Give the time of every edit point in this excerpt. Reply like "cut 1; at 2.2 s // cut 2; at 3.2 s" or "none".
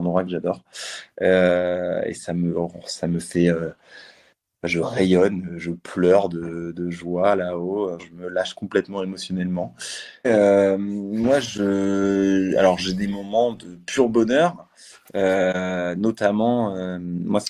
cut 1; at 8.0 s // cut 2; at 10.2 s

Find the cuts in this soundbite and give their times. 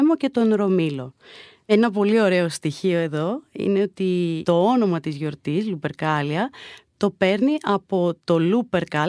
none

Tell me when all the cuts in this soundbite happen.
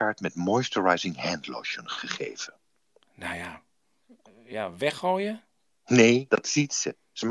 cut 1; at 6.3 s

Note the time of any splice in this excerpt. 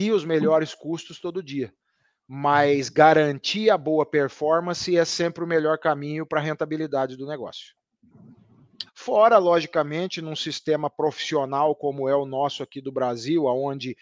cut 1; at 8.9 s

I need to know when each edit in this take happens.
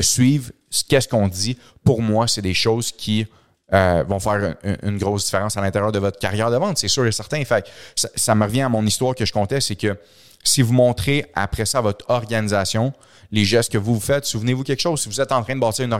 none

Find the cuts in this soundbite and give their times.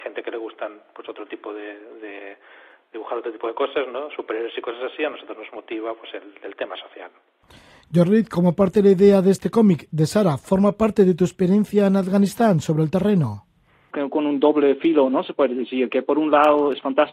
cut 1; at 13.9 s

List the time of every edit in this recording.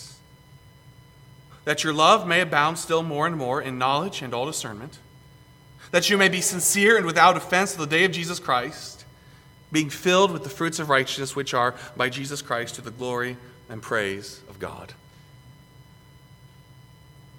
cut 1; at 5.9 s

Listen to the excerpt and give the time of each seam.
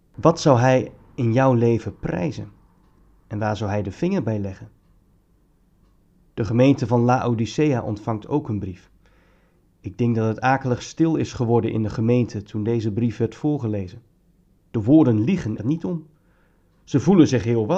cut 1; at 15.6 s

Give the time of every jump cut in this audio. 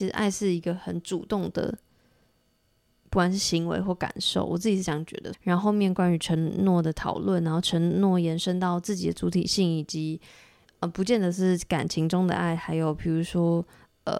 cut 1; at 5.3 s

